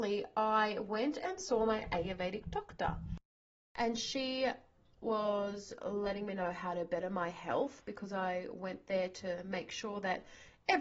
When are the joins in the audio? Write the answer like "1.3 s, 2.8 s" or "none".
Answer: none